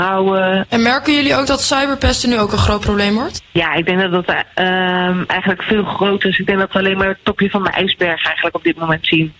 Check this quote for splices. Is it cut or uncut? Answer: uncut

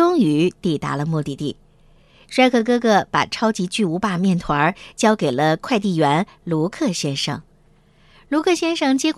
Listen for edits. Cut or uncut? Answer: uncut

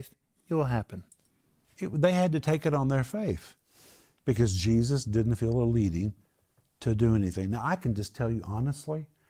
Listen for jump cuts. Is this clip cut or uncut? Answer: uncut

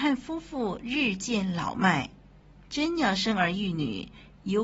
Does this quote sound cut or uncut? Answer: uncut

